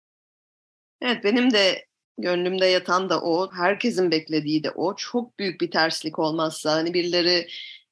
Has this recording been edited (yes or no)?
yes